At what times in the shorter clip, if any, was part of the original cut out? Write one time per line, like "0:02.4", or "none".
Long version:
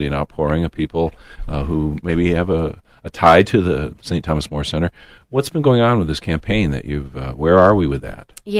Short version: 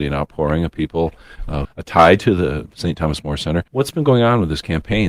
0:01.6
0:03.7